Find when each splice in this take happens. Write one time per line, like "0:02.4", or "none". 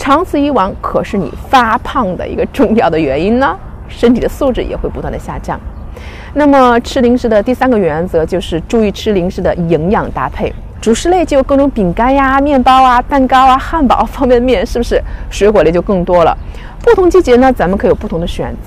0:10.7